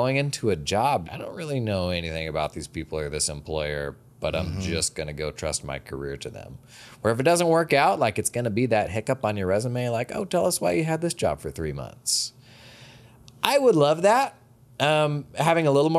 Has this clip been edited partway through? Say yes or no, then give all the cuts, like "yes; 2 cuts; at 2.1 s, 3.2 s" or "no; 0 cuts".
yes; 1 cut; at 1.0 s